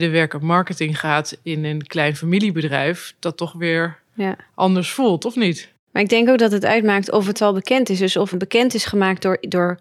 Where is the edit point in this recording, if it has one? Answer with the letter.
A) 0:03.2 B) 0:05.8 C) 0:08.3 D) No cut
C